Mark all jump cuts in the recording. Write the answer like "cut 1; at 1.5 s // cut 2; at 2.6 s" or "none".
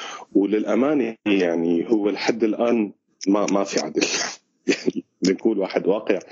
none